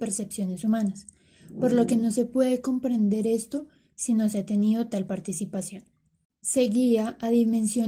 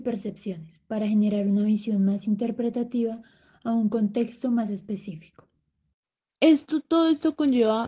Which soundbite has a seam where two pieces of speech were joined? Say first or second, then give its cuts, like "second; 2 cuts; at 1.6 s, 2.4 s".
second; 1 cut; at 6.3 s